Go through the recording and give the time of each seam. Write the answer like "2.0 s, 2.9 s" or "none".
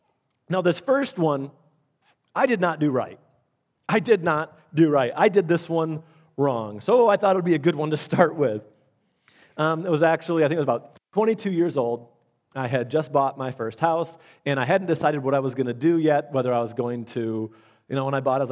none